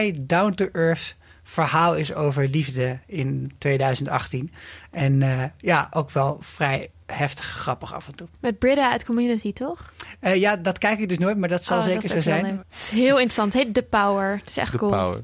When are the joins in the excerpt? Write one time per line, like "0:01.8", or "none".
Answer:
0:08.3
0:12.6